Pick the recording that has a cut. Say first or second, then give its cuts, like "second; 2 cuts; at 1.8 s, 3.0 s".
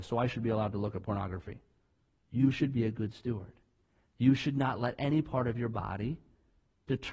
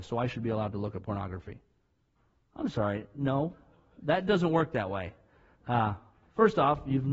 first; 1 cut; at 2.2 s